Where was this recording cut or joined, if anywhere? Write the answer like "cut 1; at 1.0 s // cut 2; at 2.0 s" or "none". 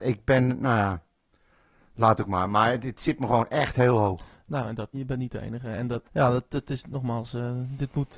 cut 1; at 4.9 s // cut 2; at 6.0 s